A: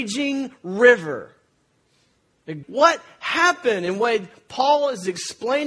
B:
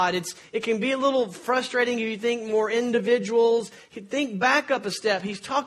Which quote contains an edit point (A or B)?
A